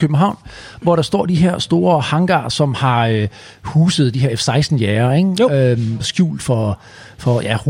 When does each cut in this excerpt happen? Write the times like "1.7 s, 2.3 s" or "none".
none